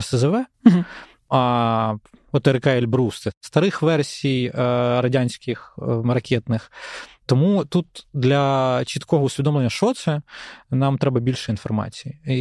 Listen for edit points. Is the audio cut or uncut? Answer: uncut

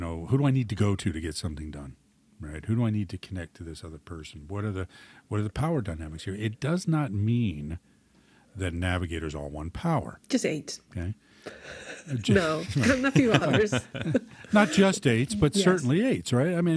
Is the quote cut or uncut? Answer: uncut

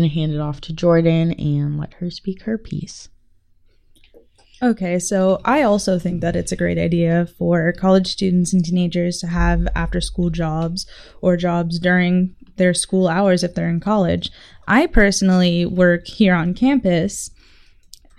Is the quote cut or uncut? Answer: uncut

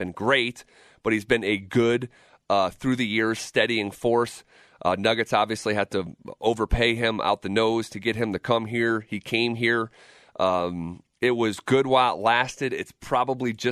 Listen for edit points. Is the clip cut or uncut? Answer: uncut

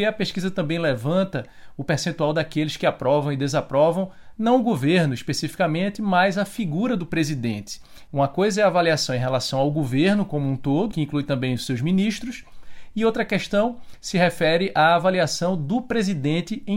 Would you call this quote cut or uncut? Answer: cut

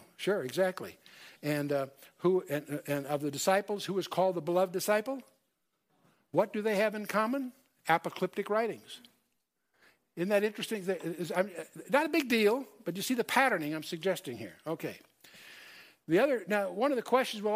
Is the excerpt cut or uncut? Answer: uncut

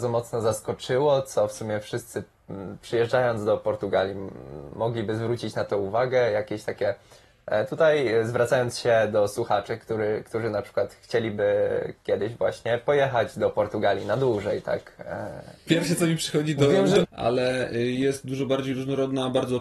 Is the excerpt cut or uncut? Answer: cut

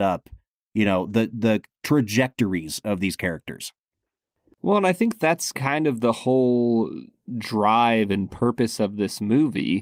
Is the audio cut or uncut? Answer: uncut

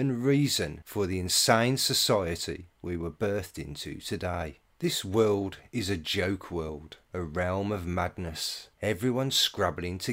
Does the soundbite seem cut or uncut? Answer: cut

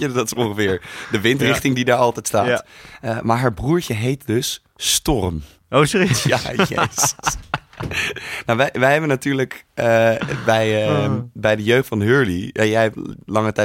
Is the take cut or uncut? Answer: uncut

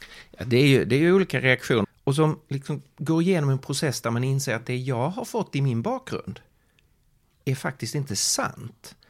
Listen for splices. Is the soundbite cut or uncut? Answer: cut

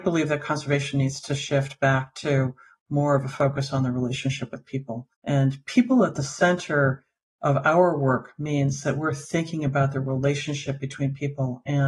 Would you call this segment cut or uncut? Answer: cut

